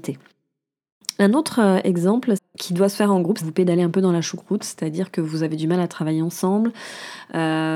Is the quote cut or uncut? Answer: cut